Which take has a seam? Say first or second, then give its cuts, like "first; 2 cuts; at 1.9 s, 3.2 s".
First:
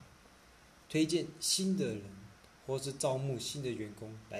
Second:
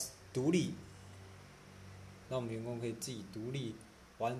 second; 1 cut; at 2.3 s